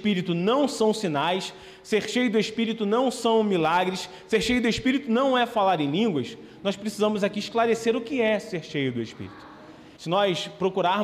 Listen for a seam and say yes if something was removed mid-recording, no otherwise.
yes